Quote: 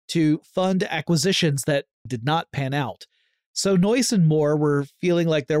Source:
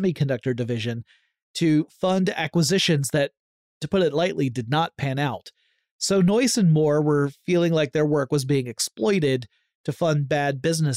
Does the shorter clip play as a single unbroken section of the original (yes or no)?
no